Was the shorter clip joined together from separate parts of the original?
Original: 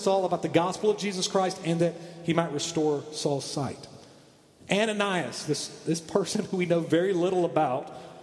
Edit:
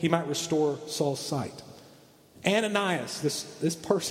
no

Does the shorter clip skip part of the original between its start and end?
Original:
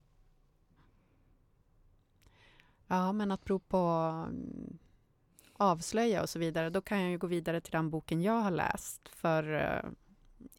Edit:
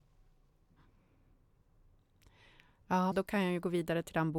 yes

